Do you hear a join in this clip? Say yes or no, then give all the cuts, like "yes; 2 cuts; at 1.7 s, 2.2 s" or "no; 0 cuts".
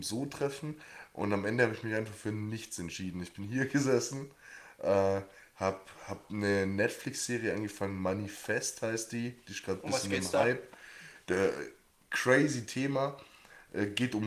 no; 0 cuts